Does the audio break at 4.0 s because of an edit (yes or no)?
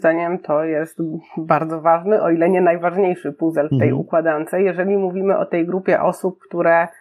no